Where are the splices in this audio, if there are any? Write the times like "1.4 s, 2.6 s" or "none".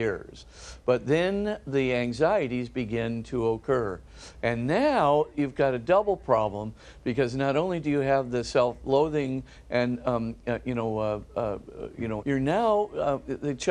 12.2 s